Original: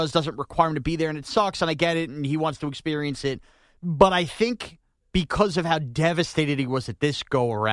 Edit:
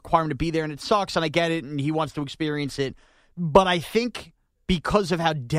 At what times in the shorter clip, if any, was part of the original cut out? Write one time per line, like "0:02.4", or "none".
none